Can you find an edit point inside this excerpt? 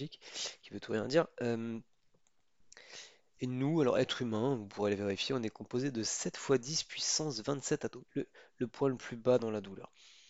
yes; 1 cut; at 8.1 s

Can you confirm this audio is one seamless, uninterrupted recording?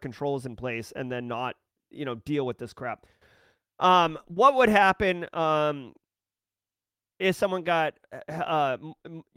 yes; 0 cuts

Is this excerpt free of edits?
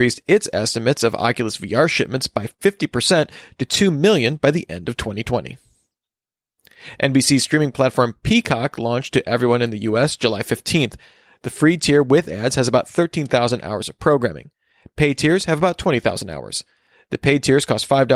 yes; 0 cuts

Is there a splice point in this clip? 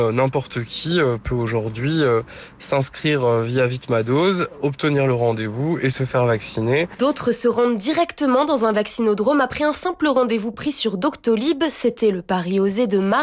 no; 0 cuts

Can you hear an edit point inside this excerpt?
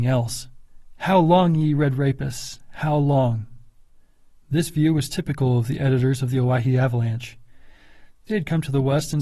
yes; 1 cut; at 8.1 s

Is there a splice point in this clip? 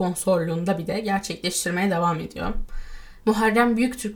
yes; 1 cut; at 3.2 s

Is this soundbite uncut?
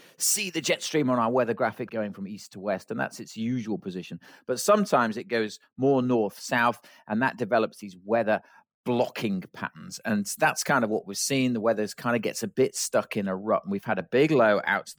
no; 1 cut; at 1.9 s

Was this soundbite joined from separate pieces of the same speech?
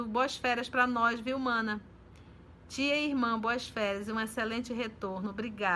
no; 0 cuts

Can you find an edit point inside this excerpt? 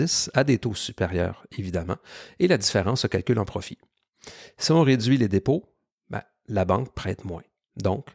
no; 0 cuts

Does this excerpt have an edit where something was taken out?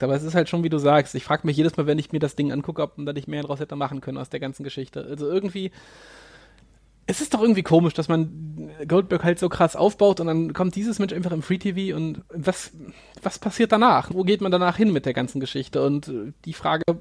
yes; 1 cut; at 14.1 s

